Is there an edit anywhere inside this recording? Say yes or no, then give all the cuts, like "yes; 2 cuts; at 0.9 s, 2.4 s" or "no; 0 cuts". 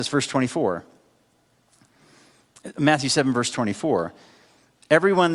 no; 0 cuts